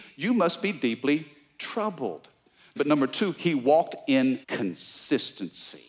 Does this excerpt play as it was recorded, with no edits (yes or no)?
no